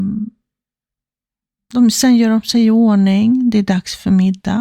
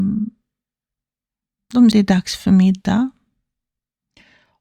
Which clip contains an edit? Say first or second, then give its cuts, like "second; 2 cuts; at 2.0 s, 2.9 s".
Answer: second; 1 cut; at 1.9 s